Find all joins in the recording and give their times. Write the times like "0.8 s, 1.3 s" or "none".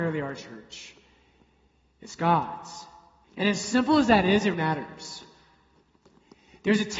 3.2 s, 4.5 s